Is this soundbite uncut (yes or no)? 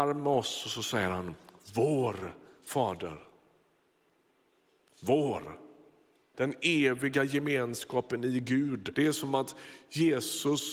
no